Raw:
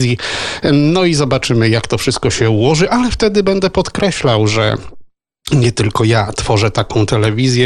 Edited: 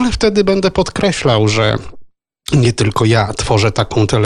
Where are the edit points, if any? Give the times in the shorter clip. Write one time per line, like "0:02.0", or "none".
none